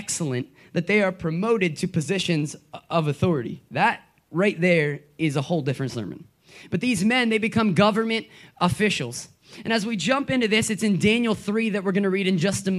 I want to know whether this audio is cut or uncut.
uncut